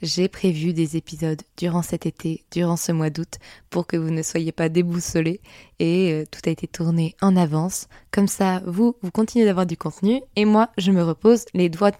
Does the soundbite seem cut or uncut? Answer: uncut